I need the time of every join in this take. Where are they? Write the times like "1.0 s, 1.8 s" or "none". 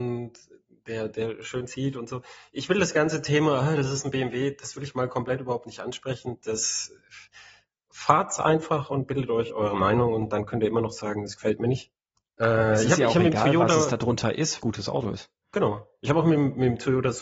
12.3 s, 14.6 s